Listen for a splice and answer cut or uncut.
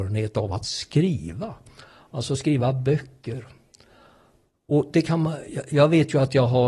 uncut